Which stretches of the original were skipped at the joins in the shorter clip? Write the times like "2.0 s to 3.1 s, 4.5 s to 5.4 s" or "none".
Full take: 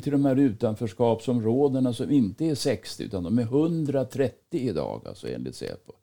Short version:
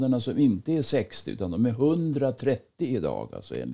none

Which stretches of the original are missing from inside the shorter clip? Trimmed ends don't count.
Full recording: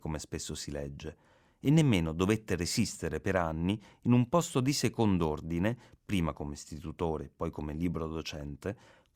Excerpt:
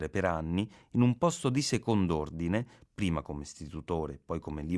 none

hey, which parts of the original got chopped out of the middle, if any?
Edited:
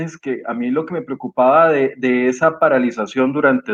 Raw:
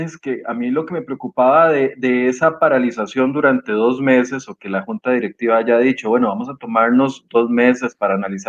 none

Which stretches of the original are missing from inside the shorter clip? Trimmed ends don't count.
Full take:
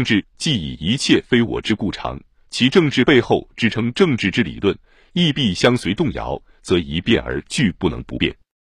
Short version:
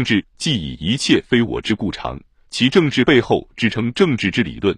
none

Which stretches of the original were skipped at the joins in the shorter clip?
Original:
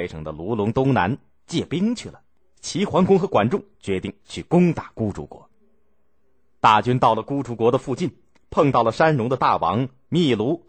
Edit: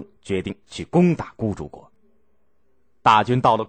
none

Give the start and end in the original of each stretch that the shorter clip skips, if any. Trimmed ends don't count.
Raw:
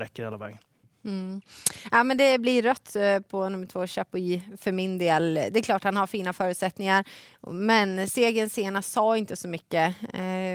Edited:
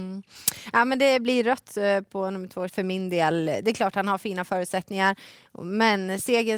3.9 s to 4.6 s

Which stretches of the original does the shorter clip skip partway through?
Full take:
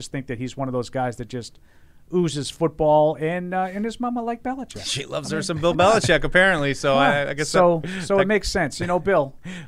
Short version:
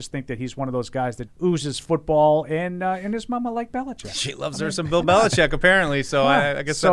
1.3 s to 2.0 s

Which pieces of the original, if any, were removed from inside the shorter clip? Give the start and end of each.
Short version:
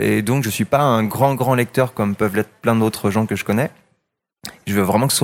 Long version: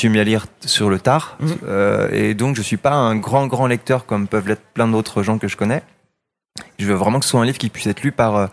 none

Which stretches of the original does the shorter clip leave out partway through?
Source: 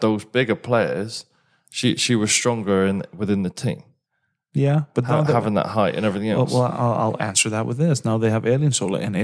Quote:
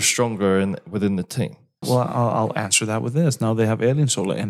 4.1 s to 6.5 s

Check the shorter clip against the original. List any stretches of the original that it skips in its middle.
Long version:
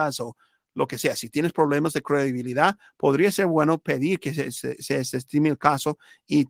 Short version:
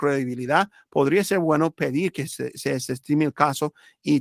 4.3 s to 4.5 s

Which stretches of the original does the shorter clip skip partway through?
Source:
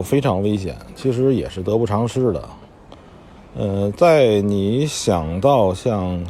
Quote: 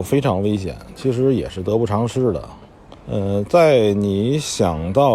3.0 s to 3.5 s

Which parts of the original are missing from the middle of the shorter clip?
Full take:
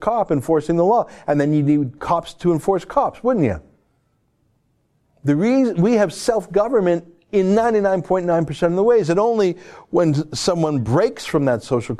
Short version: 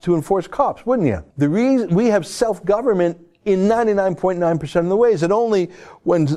3.7 s to 5.2 s

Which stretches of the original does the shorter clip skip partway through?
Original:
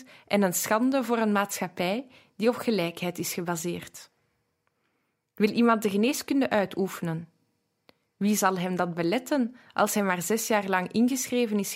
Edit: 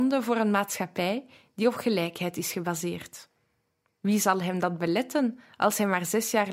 4.7 s to 8.0 s

